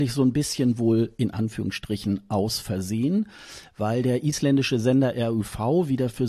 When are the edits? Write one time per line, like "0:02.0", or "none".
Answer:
none